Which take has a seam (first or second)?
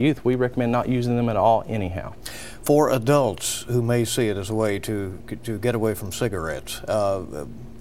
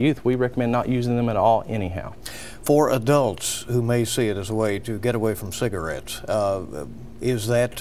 second